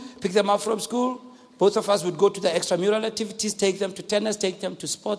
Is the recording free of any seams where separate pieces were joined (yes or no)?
yes